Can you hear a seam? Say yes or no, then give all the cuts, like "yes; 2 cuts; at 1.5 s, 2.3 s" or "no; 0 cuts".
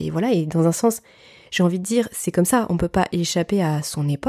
no; 0 cuts